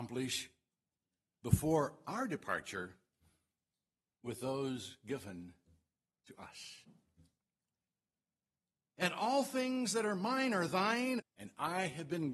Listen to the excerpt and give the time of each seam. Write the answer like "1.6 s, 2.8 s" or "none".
9.0 s, 11.2 s